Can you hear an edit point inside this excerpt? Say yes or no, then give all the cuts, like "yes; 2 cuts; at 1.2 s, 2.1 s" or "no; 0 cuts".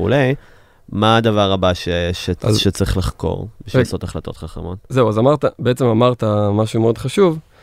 no; 0 cuts